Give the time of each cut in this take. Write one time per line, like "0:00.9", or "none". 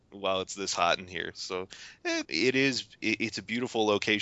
0:02.2